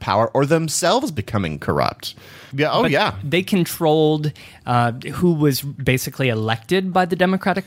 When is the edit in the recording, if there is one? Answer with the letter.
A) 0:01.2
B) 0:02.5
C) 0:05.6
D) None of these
B